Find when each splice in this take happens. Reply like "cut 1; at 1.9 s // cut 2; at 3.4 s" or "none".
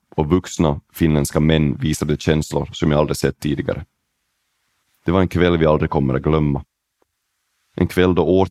none